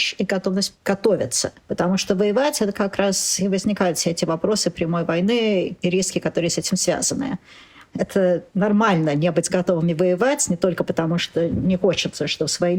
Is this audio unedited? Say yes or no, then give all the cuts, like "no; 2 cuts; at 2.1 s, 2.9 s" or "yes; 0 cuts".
no; 1 cut; at 1.6 s